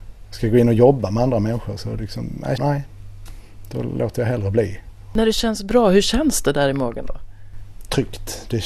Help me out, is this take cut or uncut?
cut